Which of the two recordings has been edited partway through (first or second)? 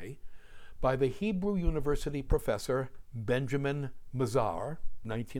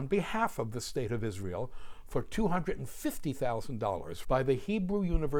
second